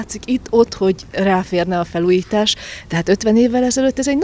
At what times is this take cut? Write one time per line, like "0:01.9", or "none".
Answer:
none